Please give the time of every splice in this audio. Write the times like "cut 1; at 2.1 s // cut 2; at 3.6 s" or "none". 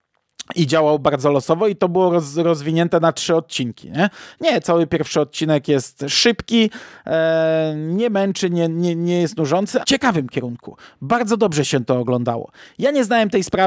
cut 1; at 4.6 s // cut 2; at 9.8 s